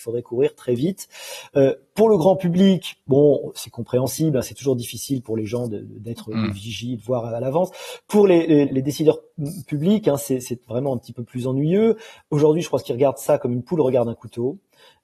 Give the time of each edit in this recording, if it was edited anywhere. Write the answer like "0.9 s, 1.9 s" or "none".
8.7 s